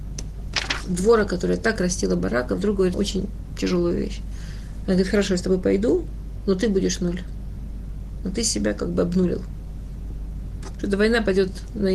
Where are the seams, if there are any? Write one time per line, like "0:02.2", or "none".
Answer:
0:02.9